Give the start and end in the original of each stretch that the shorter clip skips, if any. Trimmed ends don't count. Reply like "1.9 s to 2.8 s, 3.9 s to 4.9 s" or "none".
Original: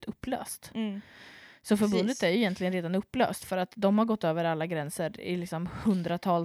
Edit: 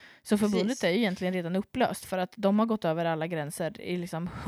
none